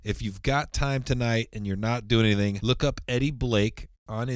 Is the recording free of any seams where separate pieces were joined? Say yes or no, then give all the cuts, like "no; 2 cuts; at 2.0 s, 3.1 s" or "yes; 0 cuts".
no; 1 cut; at 2.6 s